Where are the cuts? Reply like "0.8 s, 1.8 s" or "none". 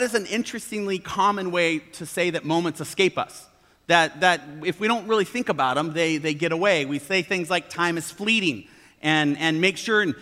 none